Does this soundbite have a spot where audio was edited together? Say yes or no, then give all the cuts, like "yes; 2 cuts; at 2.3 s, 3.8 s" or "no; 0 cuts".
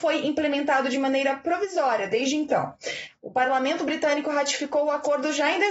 yes; 1 cut; at 3.1 s